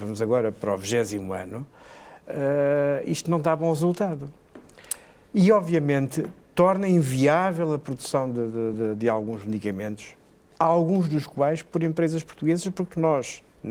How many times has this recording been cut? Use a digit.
0